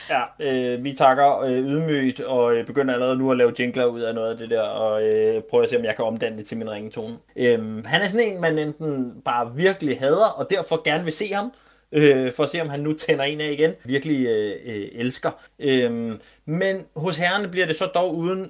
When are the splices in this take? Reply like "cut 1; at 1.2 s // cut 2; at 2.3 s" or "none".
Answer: cut 1; at 7.3 s // cut 2; at 13.9 s // cut 3; at 15.5 s

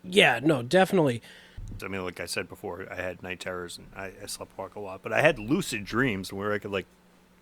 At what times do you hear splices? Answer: cut 1; at 1.8 s

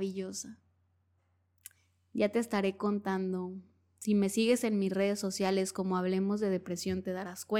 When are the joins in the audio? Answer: none

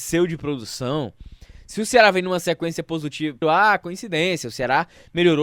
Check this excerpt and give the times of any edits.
cut 1; at 3.4 s

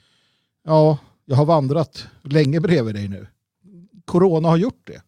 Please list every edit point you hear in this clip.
none

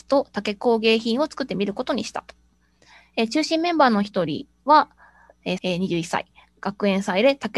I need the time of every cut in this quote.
cut 1; at 5.6 s

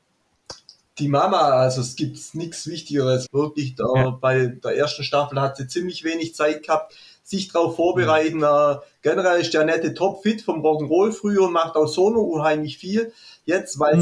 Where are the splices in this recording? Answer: cut 1; at 3.3 s

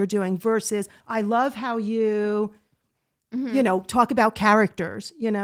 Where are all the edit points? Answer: none

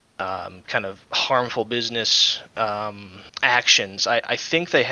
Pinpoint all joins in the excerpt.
cut 1; at 3.3 s

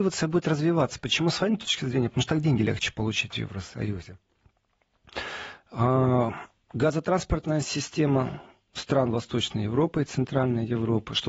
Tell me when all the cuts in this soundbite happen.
none

